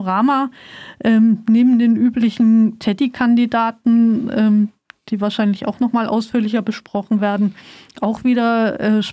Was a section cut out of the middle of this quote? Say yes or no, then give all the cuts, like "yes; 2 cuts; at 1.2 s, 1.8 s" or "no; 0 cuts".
no; 0 cuts